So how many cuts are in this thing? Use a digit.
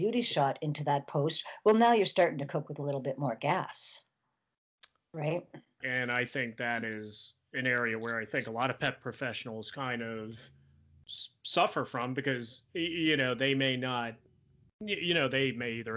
1